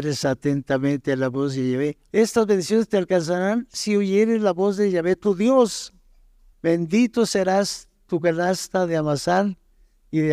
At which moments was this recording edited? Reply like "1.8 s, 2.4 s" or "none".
2.1 s, 6.5 s